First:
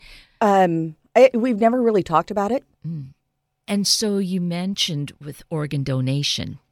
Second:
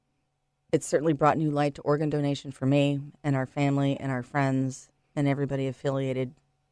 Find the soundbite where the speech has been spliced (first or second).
first